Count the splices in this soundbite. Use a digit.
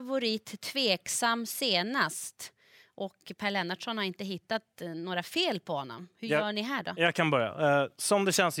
0